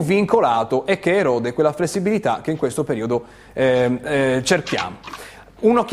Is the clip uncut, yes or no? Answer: yes